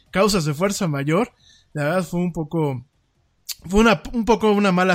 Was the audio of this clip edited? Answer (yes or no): no